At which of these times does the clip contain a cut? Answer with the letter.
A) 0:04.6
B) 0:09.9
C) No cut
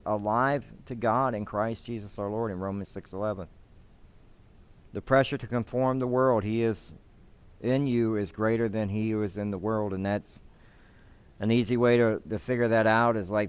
C